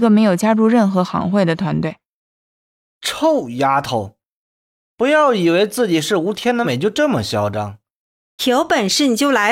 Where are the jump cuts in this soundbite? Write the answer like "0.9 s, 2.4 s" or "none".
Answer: 6.6 s, 8.4 s